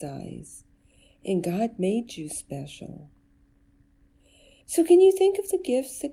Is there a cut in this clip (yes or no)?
yes